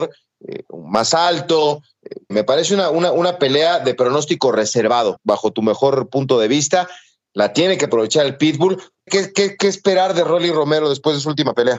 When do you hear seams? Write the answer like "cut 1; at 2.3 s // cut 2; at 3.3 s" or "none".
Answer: cut 1; at 2.3 s // cut 2; at 5.2 s // cut 3; at 9.1 s